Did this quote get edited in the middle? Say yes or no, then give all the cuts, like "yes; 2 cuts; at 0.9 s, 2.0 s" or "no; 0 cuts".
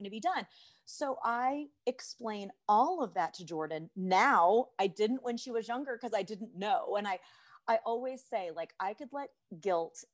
no; 0 cuts